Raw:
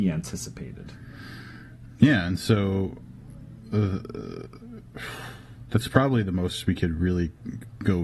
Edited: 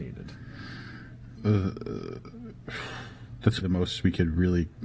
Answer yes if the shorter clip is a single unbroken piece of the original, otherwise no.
no